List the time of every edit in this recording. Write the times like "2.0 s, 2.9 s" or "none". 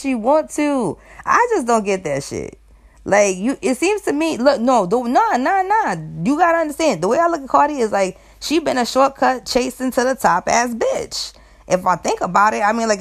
none